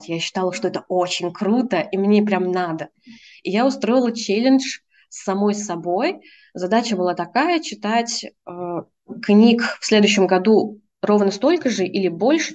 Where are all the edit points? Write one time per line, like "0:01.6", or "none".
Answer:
none

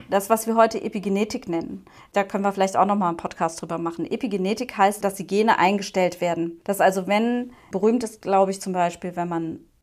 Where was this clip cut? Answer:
none

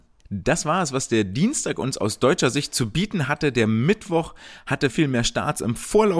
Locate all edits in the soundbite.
0:04.9

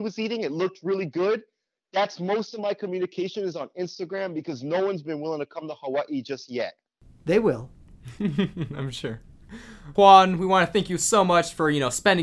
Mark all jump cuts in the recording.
none

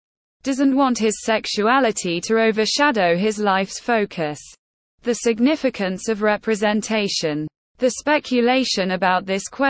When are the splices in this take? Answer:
none

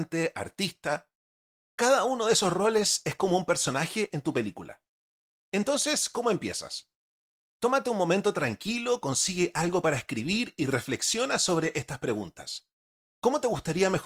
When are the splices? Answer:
0:13.1

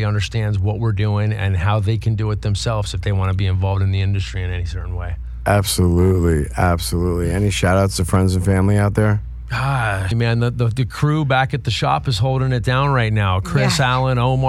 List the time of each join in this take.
0:10.1

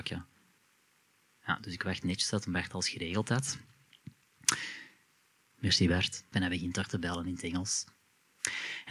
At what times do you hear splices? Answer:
0:06.3

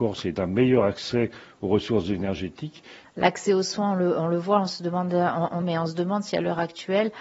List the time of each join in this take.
0:03.0
0:05.6

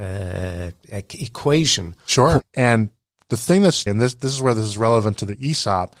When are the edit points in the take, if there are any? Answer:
0:02.4
0:03.9

